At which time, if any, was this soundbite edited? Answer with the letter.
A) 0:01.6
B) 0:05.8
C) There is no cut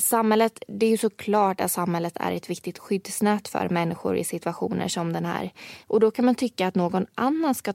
B